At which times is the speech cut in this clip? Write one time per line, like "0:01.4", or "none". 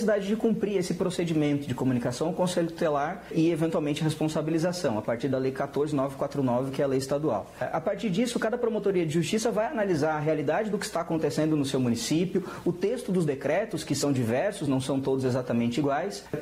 none